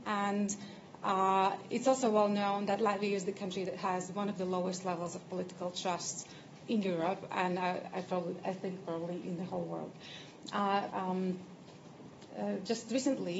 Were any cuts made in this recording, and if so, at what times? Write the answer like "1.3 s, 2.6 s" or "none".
10.9 s, 12.3 s